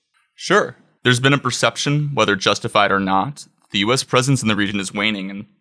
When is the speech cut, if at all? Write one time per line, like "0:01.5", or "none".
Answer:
0:01.0